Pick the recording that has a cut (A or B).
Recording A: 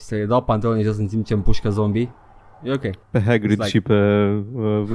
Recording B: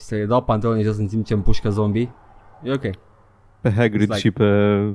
A